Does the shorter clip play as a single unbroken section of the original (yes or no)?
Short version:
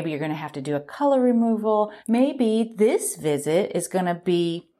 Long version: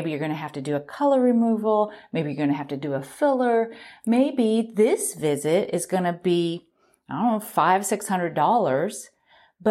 no